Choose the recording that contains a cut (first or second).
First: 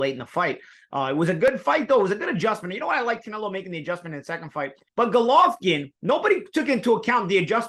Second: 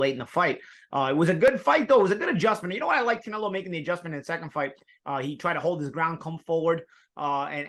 first